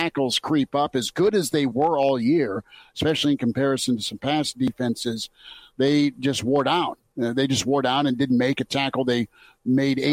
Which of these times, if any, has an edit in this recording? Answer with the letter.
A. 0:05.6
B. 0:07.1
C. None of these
C